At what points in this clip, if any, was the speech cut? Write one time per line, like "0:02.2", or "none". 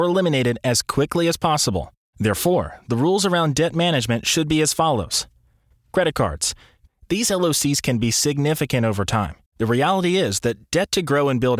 0:06.9
0:09.5